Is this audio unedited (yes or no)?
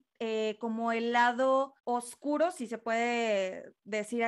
no